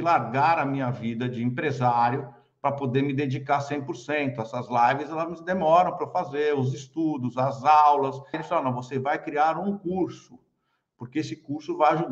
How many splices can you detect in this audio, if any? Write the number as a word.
one